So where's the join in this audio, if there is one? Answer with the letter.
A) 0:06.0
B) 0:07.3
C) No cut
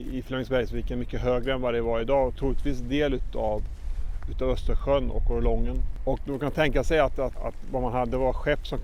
B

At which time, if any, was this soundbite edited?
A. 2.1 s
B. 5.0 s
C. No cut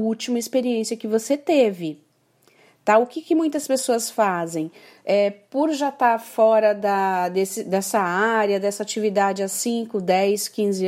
C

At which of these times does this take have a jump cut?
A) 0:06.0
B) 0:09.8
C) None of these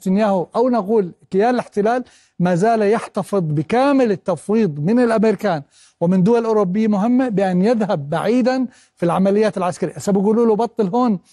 C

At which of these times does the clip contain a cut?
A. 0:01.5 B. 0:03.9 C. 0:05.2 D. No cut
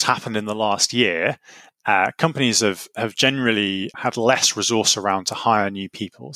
B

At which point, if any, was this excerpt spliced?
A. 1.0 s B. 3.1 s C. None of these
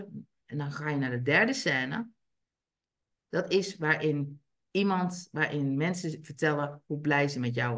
B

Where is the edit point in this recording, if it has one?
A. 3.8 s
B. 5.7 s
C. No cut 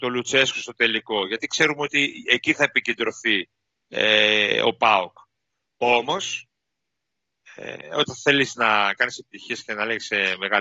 C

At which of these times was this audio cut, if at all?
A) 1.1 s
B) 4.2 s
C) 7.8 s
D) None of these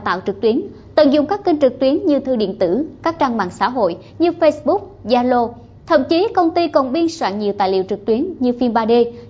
D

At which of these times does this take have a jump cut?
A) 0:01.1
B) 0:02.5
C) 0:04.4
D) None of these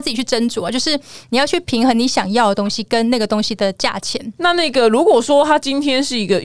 C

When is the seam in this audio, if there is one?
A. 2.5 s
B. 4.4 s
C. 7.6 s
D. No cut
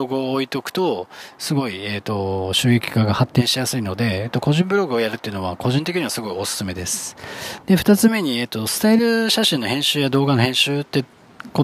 C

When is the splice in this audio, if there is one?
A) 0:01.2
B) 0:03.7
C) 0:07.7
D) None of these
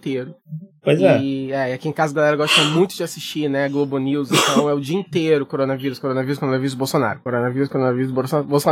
C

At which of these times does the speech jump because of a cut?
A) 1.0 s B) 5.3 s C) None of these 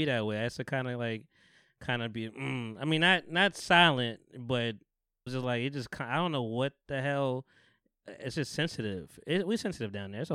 B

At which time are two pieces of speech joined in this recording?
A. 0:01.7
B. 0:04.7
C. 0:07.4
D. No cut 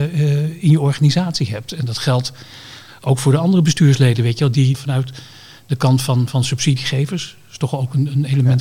B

